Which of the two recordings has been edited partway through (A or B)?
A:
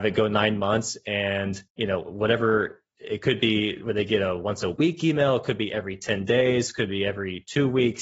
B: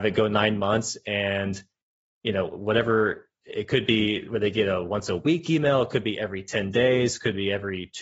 A